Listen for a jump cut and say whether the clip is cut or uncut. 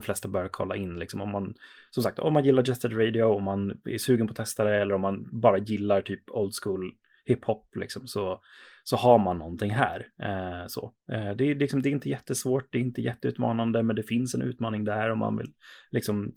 uncut